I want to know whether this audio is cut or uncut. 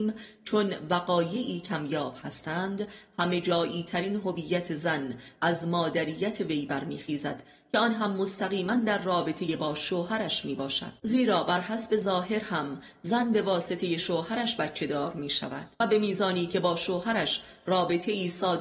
cut